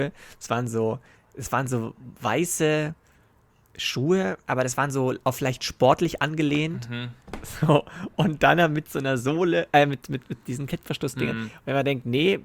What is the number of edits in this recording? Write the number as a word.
zero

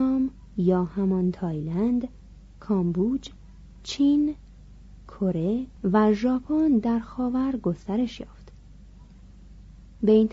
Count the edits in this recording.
one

